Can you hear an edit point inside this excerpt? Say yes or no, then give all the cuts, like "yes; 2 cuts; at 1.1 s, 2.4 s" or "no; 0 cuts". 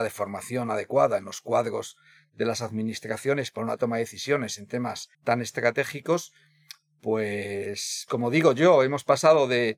yes; 2 cuts; at 5.1 s, 8.1 s